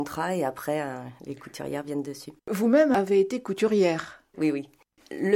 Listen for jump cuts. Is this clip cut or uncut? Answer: cut